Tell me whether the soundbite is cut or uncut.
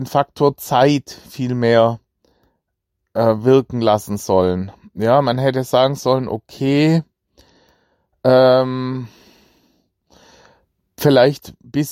uncut